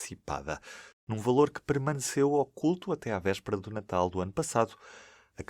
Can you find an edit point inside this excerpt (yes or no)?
yes